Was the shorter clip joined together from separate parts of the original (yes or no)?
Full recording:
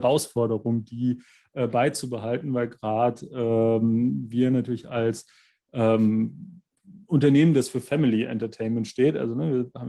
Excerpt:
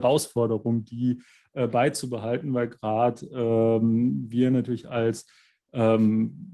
no